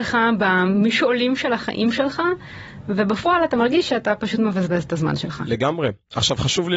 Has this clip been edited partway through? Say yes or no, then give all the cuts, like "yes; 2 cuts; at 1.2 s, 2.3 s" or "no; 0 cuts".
no; 0 cuts